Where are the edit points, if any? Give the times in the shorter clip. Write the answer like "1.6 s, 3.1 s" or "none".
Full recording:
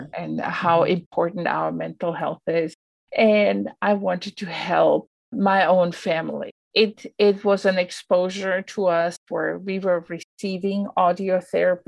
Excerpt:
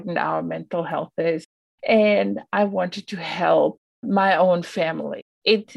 none